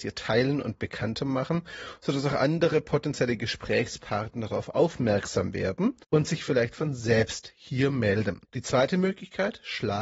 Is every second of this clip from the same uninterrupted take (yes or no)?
no